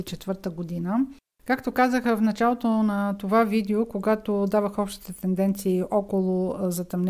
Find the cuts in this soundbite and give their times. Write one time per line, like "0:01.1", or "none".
0:01.3